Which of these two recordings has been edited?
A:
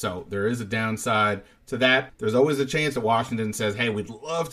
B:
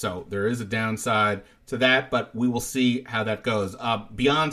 A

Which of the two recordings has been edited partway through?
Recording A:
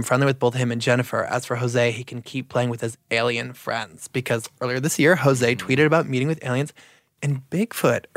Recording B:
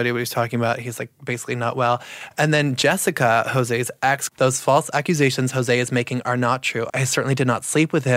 B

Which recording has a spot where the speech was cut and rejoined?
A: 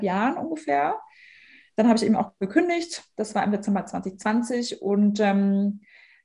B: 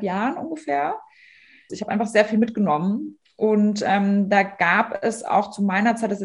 B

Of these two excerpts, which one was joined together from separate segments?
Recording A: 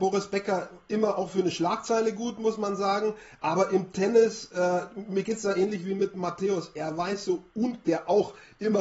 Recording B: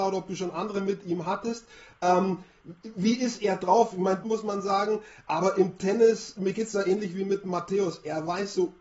B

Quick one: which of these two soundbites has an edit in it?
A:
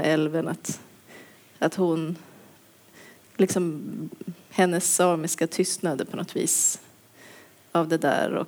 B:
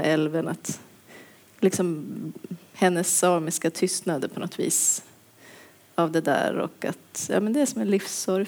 B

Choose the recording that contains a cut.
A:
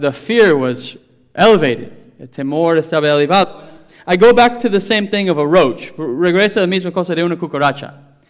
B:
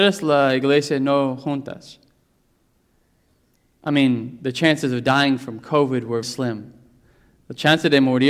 B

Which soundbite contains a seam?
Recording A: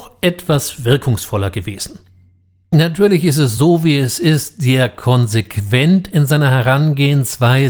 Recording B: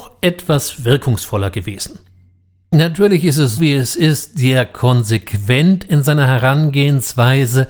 B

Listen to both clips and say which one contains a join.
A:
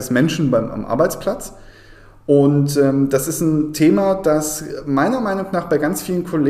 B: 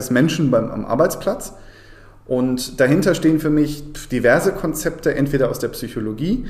B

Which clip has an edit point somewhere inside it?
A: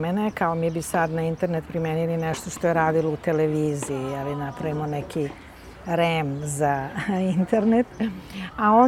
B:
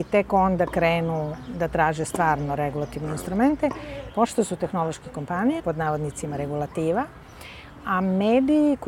B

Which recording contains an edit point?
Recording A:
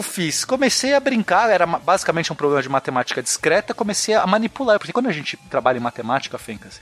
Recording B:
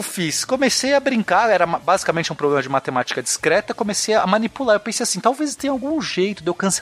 A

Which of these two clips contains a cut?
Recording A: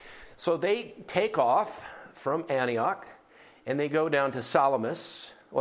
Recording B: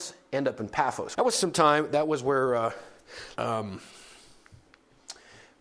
B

